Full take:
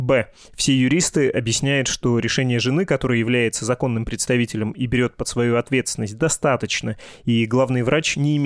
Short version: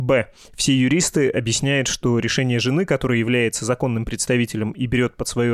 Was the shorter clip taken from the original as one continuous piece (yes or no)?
yes